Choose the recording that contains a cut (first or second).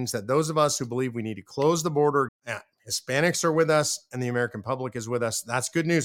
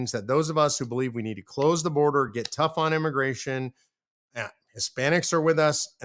first